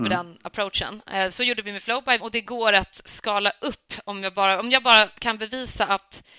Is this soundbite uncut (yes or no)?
no